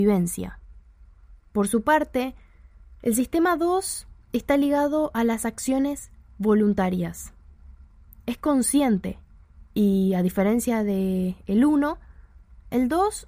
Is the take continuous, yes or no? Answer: no